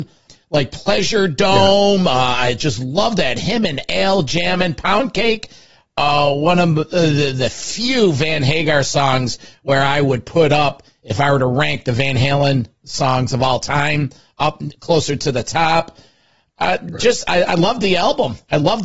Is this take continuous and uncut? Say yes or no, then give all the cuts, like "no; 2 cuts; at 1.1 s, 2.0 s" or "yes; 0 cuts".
yes; 0 cuts